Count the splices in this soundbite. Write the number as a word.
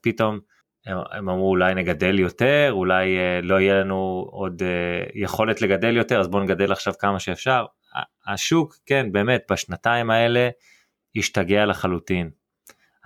zero